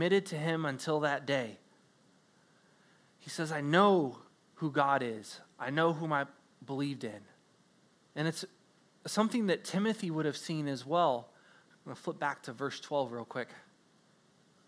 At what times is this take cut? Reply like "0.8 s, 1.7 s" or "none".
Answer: 8.0 s, 11.7 s